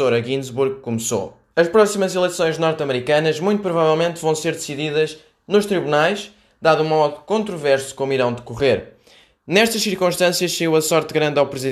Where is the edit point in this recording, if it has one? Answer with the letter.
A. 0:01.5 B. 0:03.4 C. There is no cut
A